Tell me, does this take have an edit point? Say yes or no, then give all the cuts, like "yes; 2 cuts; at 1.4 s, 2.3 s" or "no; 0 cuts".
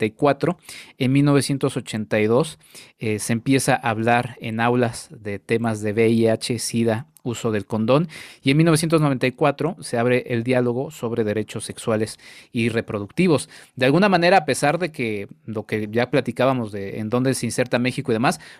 no; 0 cuts